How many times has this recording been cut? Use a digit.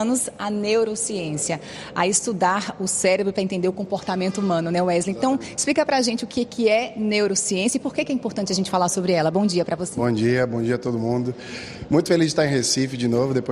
0